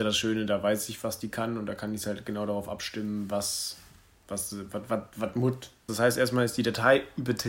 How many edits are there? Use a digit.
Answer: 1